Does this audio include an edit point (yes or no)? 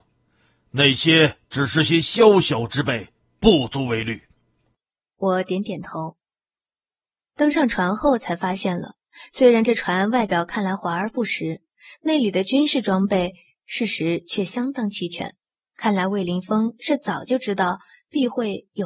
no